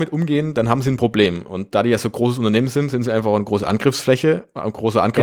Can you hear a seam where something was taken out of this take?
no; 0 cuts

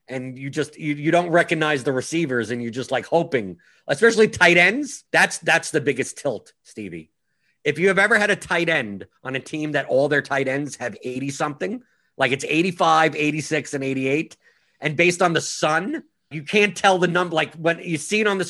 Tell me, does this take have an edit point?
yes; 2 cuts; at 5.1 s, 16.3 s

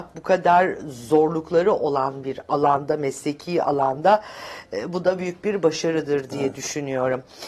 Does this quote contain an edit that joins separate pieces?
no; 0 cuts

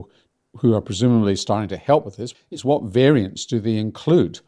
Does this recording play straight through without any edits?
no; 1 cut; at 2.3 s

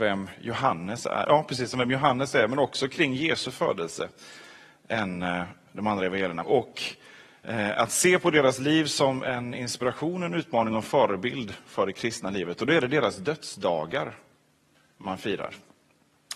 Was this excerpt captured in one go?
no; 2 cuts; at 1.2 s, 6.4 s

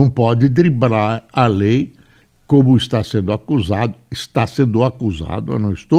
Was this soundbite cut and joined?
no; 0 cuts

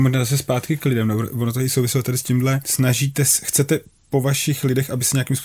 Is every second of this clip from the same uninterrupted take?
no; 1 cut; at 2.6 s

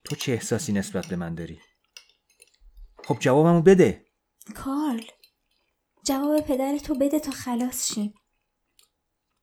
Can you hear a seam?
yes; 1 cut; at 3.0 s

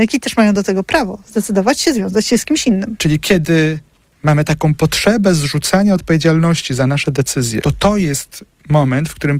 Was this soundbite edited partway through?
yes; 2 cuts; at 3.0 s, 7.6 s

